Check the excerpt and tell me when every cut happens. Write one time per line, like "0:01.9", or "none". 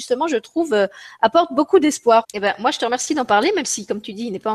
0:02.2